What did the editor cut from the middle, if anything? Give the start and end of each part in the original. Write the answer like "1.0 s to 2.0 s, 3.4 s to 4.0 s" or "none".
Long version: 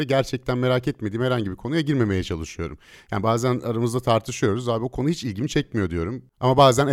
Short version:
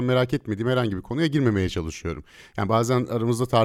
none